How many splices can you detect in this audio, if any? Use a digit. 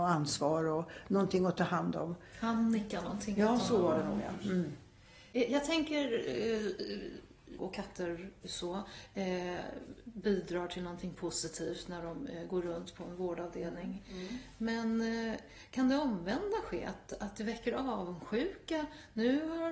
1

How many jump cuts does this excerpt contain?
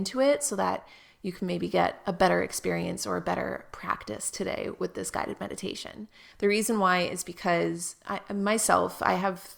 1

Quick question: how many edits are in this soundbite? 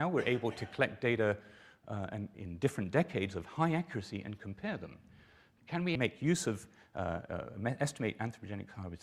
2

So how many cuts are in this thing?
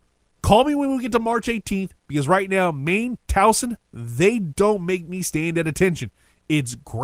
0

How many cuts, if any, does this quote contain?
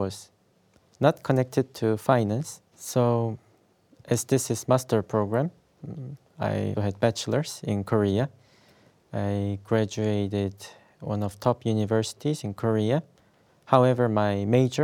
2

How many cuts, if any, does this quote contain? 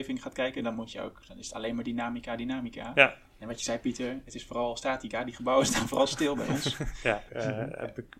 1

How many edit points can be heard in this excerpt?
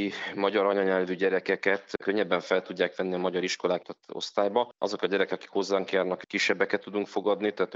1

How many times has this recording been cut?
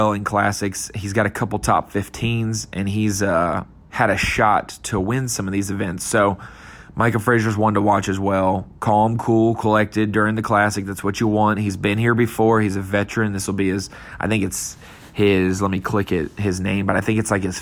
0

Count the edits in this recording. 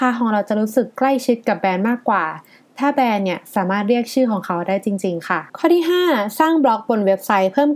1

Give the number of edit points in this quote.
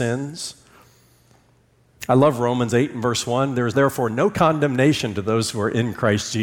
1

